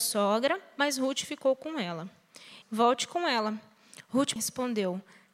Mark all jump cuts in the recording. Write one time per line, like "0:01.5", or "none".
0:02.6
0:04.4

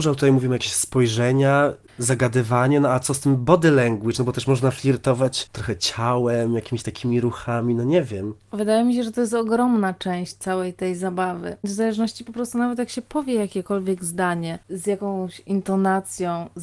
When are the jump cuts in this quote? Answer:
none

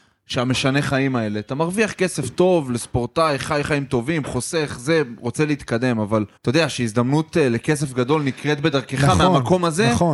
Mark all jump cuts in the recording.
0:06.4

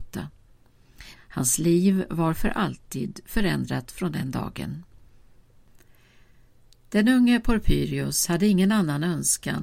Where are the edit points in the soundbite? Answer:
0:01.2

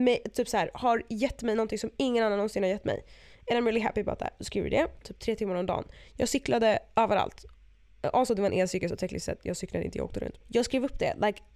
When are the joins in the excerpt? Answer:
0:05.0
0:10.4

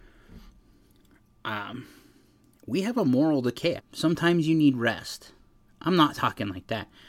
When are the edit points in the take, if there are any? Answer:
0:03.8

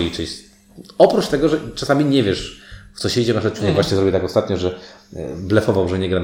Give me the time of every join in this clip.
none

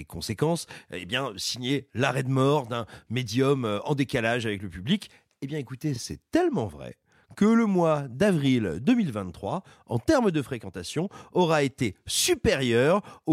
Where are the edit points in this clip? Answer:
none

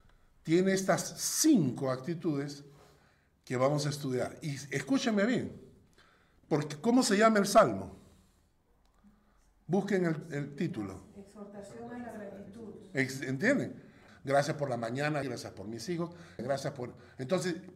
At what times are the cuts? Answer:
0:14.1
0:15.2
0:16.4

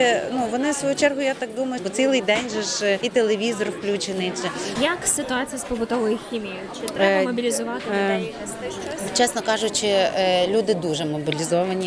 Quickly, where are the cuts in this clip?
0:01.8
0:04.7

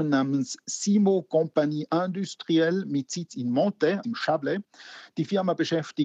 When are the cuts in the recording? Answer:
0:04.0

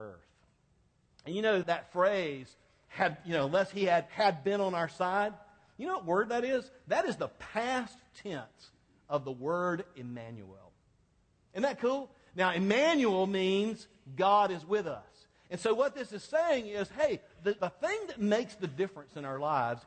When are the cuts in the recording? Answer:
0:01.6
0:17.6

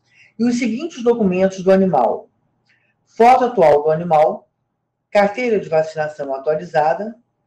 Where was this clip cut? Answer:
none

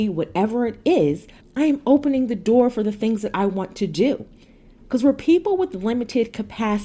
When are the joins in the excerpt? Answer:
0:01.4

